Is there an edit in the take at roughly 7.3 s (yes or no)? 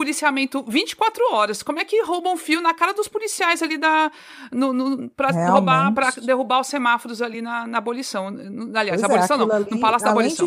no